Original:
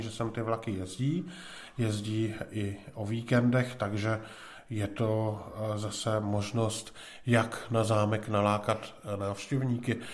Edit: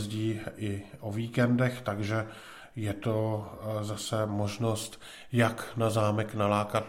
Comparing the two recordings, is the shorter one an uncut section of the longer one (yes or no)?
yes